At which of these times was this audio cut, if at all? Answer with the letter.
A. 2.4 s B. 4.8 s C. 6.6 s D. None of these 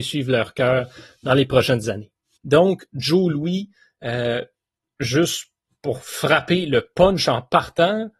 A